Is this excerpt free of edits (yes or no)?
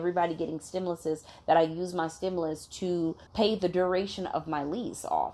no